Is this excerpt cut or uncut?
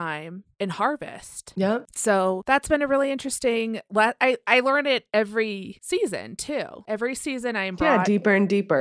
uncut